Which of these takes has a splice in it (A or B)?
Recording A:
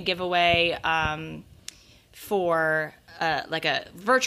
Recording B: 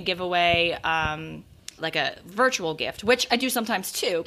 B